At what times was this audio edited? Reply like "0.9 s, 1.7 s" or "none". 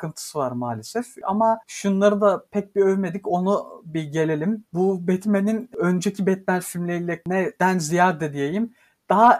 1.6 s